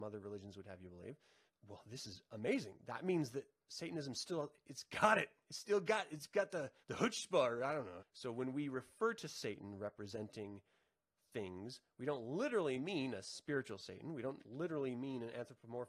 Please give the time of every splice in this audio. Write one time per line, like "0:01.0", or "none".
0:01.5
0:06.8
0:08.0